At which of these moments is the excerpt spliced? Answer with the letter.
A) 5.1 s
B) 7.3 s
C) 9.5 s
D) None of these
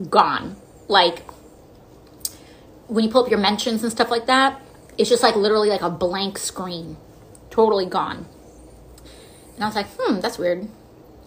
D